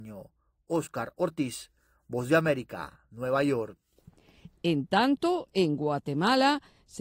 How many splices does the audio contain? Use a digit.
0